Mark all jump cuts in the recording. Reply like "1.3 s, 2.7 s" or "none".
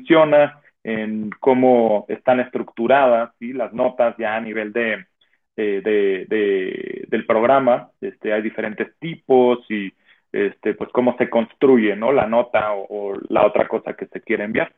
none

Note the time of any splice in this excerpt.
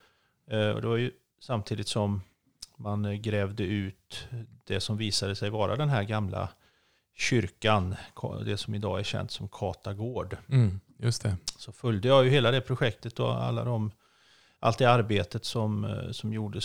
none

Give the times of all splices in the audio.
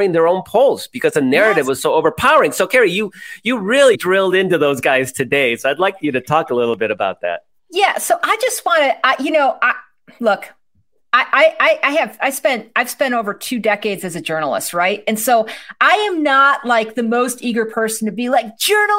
3.9 s

